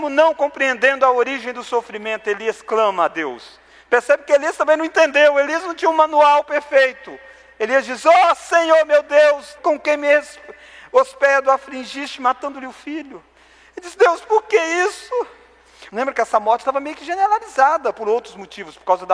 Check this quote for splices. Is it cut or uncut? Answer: cut